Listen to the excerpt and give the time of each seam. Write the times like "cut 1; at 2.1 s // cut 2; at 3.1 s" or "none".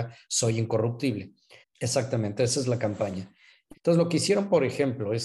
cut 1; at 1.6 s // cut 2; at 3.7 s